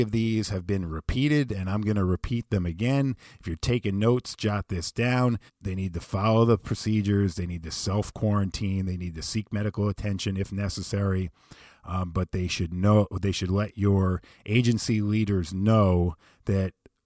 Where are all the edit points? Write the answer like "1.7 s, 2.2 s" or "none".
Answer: 5.5 s